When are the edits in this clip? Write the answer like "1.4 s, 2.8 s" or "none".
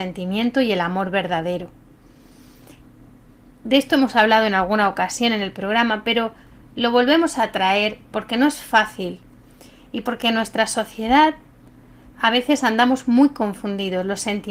none